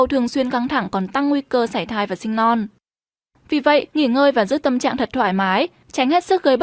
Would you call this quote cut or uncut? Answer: cut